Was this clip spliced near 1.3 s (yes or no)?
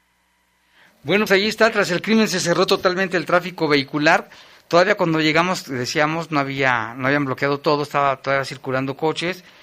yes